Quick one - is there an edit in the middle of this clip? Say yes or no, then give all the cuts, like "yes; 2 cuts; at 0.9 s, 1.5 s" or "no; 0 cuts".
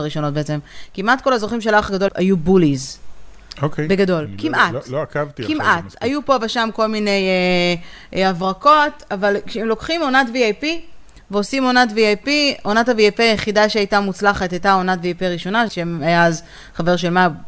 yes; 2 cuts; at 2.1 s, 15.7 s